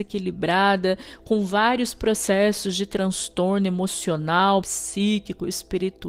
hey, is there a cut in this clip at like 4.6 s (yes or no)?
yes